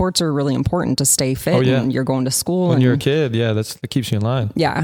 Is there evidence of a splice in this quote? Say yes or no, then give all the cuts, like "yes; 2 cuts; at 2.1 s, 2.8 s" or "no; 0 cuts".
no; 0 cuts